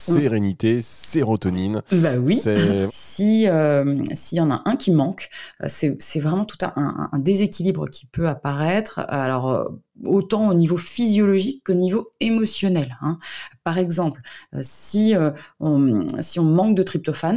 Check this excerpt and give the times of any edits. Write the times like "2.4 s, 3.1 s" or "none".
2.9 s